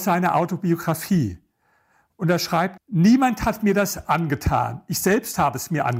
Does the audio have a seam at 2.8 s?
yes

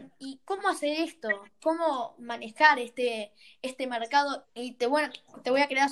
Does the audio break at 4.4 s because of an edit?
yes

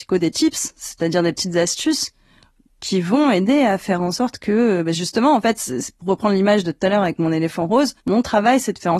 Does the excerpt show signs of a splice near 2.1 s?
no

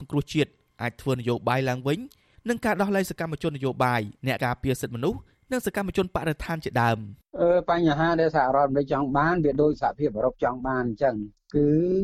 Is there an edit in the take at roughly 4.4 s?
yes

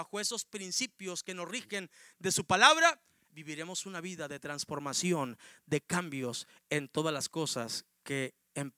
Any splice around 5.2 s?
no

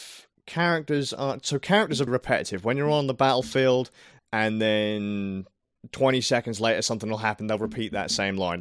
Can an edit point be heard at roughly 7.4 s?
no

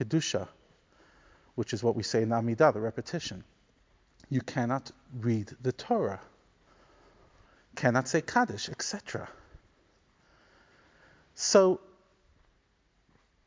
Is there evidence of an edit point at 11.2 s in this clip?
no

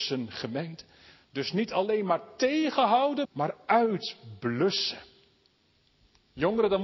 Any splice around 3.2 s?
yes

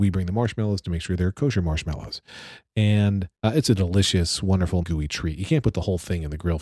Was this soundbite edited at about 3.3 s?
yes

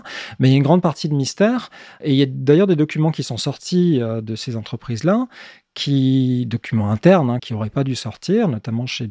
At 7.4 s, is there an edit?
yes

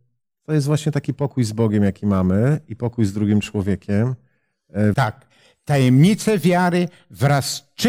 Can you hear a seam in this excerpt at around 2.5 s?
no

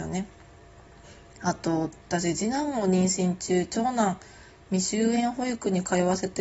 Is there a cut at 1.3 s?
no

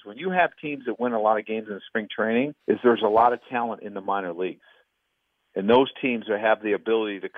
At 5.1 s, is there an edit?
no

